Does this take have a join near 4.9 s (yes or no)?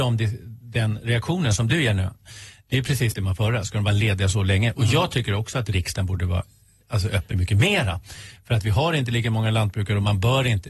no